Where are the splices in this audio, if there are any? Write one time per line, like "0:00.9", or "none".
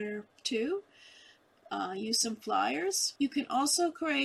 0:03.2